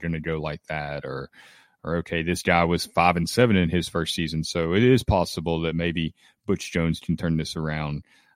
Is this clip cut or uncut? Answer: uncut